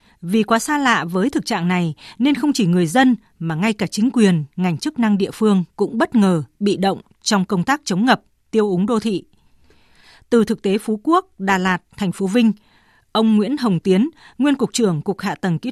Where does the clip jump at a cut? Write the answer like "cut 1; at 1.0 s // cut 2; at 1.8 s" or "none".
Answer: none